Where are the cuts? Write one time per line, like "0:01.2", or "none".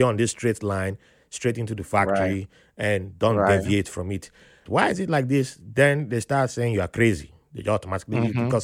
0:04.7